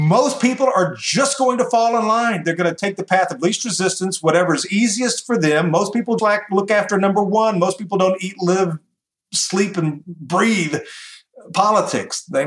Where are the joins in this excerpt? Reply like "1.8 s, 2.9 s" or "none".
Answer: 6.2 s